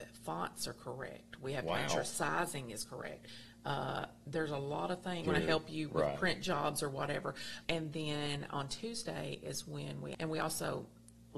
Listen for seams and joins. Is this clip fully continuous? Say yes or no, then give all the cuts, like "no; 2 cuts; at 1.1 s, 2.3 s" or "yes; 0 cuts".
no; 3 cuts; at 5.2 s, 7.6 s, 10.1 s